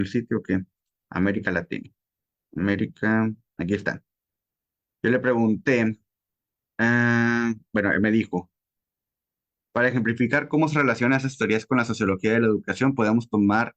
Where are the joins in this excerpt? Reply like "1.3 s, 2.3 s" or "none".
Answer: 1.0 s